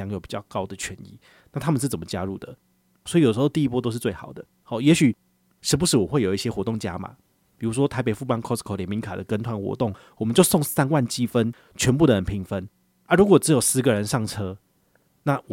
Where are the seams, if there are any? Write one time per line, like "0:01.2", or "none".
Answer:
0:03.1
0:04.6